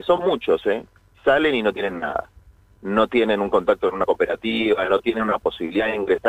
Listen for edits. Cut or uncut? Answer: uncut